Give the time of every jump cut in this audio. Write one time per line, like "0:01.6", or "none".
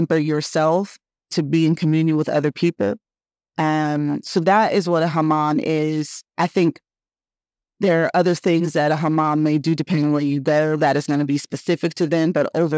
0:06.3